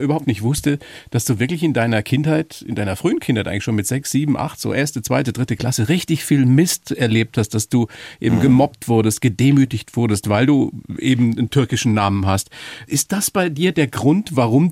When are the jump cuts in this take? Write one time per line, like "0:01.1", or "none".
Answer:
0:12.9